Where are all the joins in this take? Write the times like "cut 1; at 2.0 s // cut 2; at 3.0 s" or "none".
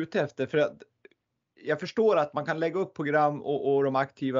none